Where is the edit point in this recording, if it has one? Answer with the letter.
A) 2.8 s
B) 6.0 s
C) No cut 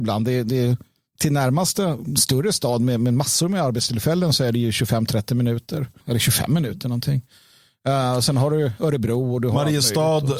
B